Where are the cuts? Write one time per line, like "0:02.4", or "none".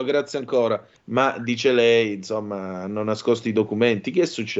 0:01.0